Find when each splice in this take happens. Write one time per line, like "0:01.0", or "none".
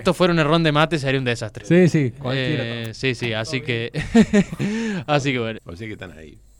0:05.6